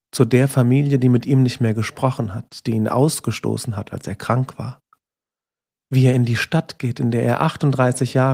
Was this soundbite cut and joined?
no; 0 cuts

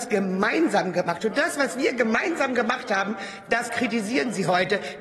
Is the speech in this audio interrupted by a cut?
no; 0 cuts

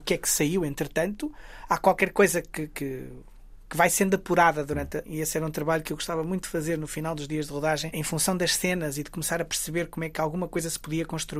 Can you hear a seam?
yes; 2 cuts; at 5.0 s, 7.9 s

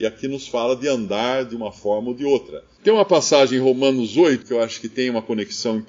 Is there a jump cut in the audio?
yes; 2 cuts; at 2.8 s, 4.4 s

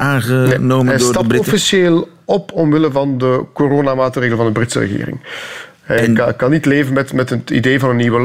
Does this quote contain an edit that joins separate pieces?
no; 0 cuts

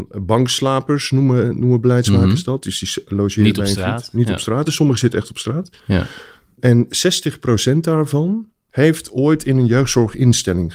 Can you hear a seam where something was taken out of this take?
no; 0 cuts

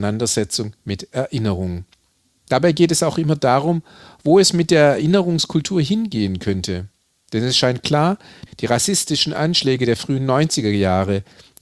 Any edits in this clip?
yes; 1 cut; at 8.5 s

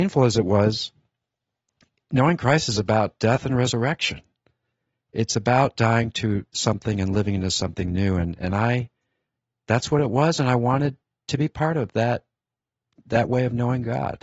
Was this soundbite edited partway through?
no; 0 cuts

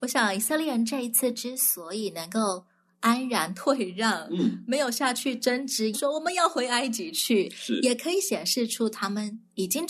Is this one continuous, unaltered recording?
no; 1 cut; at 5.9 s

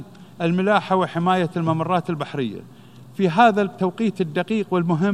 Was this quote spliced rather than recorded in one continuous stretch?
no; 0 cuts

